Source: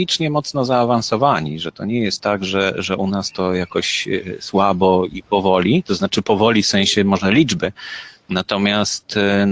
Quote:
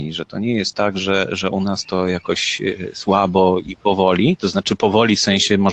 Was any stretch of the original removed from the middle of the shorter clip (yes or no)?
no